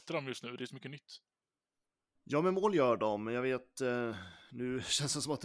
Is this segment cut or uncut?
uncut